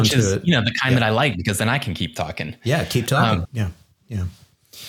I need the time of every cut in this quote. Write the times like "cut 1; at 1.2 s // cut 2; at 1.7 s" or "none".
cut 1; at 3.4 s